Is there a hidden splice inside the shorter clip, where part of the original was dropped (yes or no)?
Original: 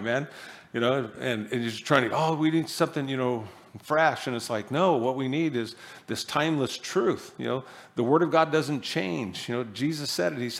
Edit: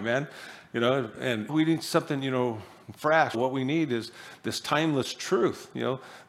yes